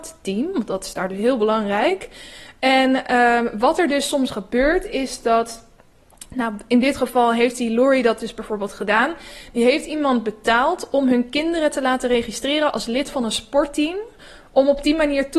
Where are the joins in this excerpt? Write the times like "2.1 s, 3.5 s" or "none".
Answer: none